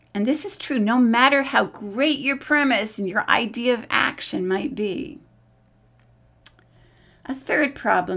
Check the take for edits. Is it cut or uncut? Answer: uncut